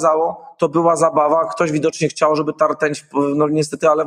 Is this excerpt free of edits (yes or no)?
yes